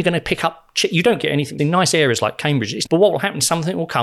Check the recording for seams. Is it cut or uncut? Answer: cut